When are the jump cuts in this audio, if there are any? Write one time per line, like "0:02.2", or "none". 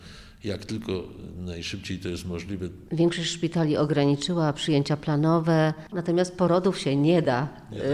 0:02.9
0:05.9